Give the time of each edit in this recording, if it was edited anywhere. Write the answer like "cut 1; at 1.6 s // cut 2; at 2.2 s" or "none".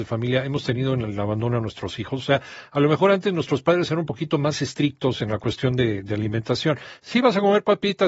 none